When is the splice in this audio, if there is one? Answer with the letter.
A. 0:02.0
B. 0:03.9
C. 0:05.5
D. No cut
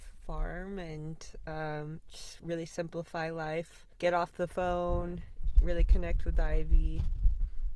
B